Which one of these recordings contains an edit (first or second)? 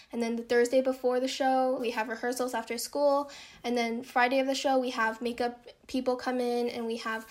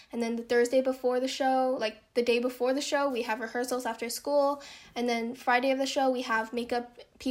first